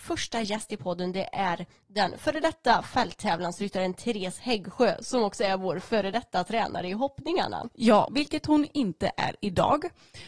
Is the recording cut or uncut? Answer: cut